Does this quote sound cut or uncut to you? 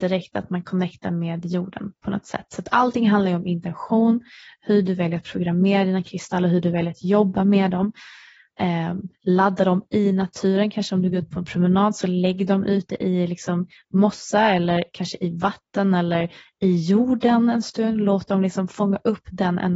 uncut